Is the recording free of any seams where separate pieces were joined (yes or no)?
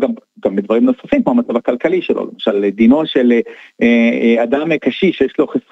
yes